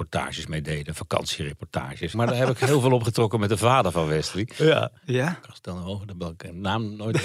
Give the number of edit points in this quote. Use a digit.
2